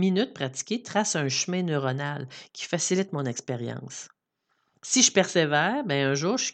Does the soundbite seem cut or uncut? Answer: uncut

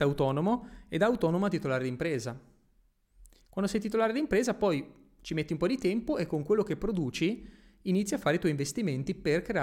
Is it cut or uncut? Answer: uncut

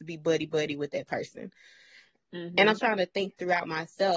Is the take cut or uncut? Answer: cut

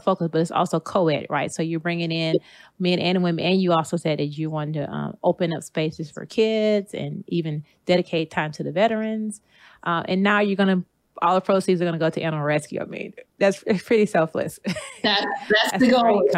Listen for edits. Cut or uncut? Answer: uncut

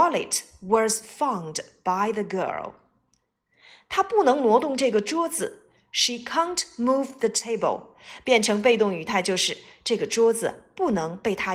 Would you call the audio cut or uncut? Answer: uncut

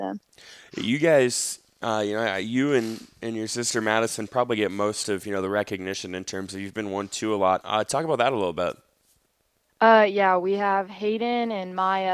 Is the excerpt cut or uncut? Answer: cut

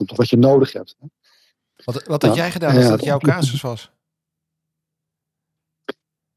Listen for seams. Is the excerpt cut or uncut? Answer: cut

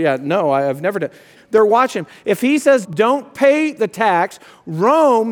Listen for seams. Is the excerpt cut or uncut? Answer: cut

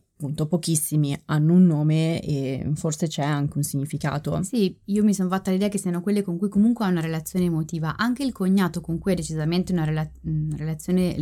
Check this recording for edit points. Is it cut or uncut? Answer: uncut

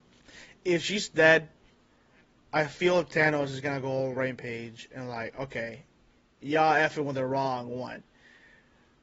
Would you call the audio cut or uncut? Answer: uncut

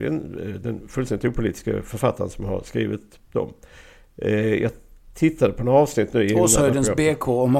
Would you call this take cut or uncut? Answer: uncut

